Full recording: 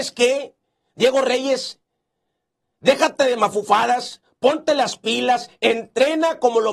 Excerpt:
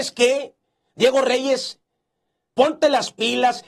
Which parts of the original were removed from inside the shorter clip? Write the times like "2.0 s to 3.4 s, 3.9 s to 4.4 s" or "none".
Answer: 2.5 s to 4.4 s